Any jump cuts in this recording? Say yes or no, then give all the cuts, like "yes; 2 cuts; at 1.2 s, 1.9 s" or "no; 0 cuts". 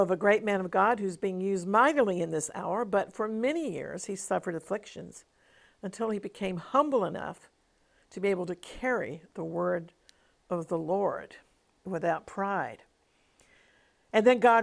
no; 0 cuts